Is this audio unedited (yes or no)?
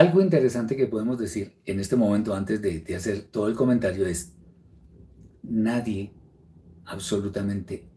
yes